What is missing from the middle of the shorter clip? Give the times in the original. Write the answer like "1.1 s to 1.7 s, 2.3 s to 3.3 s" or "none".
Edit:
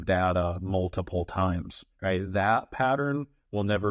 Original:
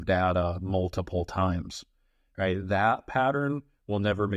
1.9 s to 2.3 s